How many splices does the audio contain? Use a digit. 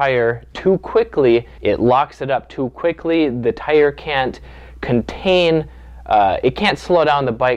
1